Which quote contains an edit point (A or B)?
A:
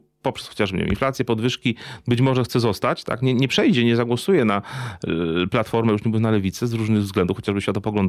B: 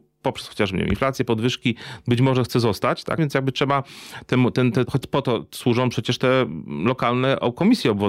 B